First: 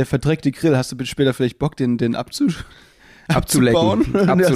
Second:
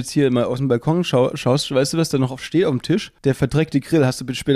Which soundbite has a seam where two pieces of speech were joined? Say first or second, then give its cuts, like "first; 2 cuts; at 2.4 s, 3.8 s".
second; 1 cut; at 3.2 s